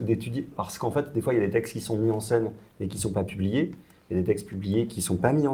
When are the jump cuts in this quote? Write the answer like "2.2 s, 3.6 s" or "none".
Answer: none